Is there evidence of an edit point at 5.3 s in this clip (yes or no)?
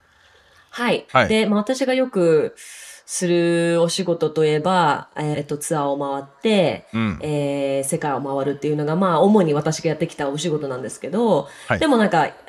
yes